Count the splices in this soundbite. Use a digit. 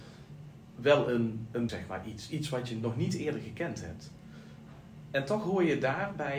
1